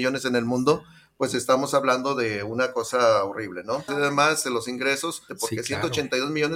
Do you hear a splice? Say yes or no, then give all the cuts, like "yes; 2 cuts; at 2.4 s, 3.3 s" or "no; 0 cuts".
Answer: yes; 2 cuts; at 3.9 s, 5.3 s